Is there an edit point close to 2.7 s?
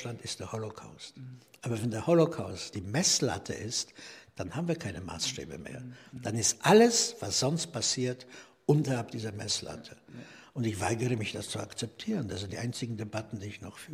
yes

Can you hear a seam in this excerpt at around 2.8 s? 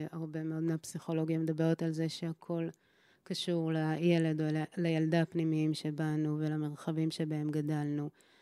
no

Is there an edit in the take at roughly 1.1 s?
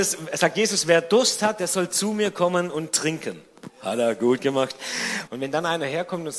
no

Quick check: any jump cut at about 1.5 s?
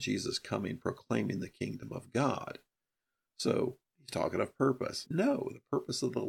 no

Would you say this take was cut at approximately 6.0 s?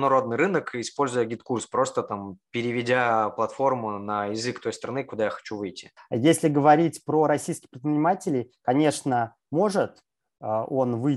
yes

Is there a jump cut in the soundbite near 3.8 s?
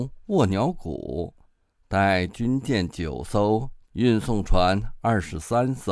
yes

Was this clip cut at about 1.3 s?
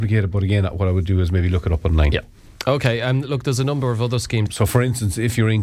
no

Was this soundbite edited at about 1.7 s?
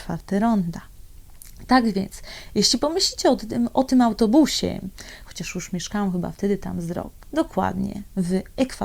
no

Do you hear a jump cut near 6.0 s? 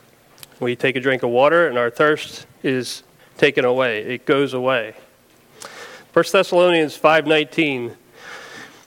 yes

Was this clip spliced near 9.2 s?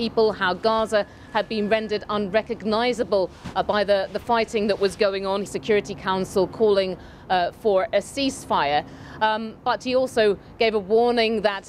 no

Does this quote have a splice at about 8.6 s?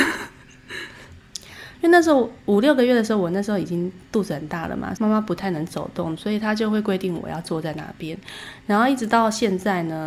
no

